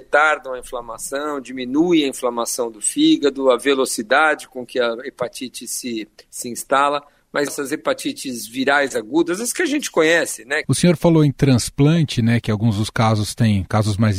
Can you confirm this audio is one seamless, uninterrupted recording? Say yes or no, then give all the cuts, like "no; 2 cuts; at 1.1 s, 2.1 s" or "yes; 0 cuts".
no; 2 cuts; at 7.5 s, 10.6 s